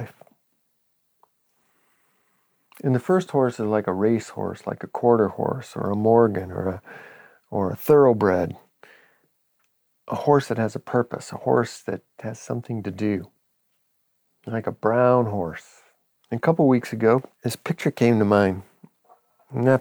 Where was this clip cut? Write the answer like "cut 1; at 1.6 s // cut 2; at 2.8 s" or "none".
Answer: cut 1; at 16.1 s // cut 2; at 17.3 s